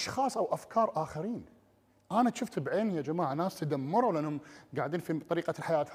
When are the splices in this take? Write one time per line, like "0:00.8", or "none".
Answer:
none